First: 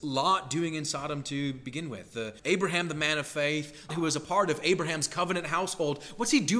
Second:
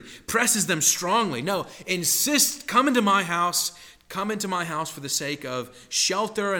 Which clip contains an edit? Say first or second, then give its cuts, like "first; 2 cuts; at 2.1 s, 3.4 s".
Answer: first; 2 cuts; at 2.4 s, 3.9 s